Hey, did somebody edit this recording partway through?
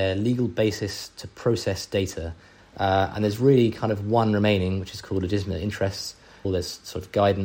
yes; 2 cuts; at 2.6 s, 6.4 s

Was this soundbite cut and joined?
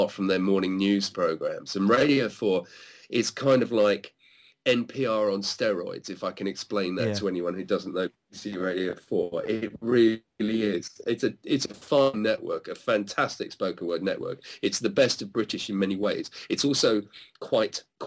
no; 0 cuts

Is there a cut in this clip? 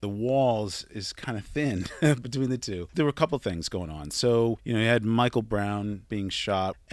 yes; 1 cut; at 2.9 s

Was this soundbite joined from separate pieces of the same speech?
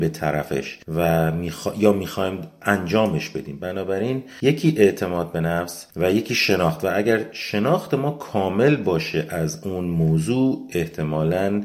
no; 0 cuts

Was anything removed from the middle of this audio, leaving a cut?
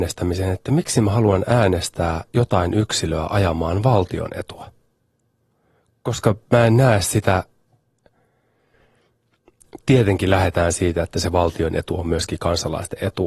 no; 0 cuts

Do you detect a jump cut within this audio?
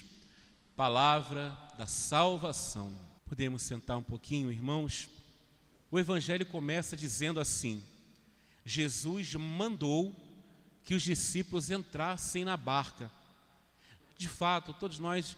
yes; 3 cuts; at 3.2 s, 5.9 s, 14.0 s

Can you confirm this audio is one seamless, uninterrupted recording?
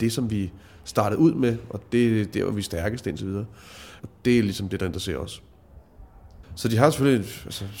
no; 2 cuts; at 4.0 s, 6.4 s

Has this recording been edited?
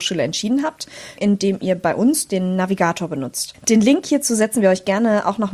yes; 1 cut; at 1.2 s

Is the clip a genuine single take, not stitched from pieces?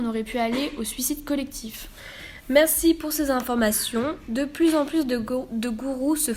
yes; 0 cuts

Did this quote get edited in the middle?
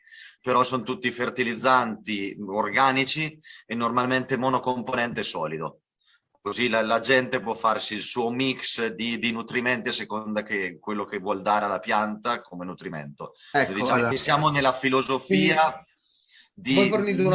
no; 0 cuts

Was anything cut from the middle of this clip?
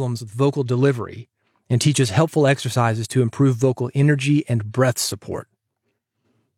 no; 0 cuts

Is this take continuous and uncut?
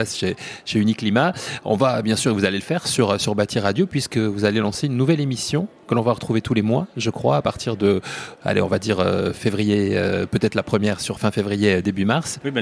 yes; 0 cuts

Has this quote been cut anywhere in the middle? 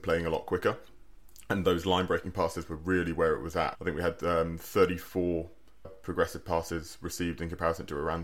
yes; 2 cuts; at 3.7 s, 5.8 s

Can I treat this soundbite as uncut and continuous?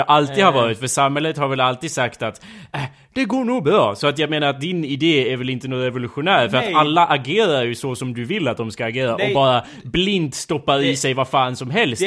yes; 0 cuts

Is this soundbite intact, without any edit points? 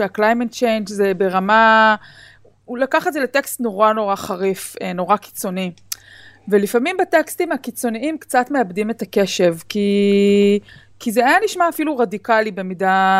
yes; 0 cuts

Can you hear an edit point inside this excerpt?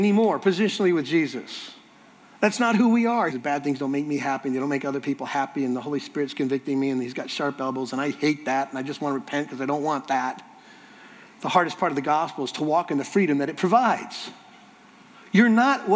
yes; 1 cut; at 3.3 s

